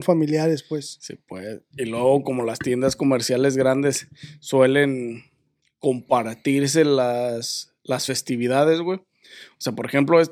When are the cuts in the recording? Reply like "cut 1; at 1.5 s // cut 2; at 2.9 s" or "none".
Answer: none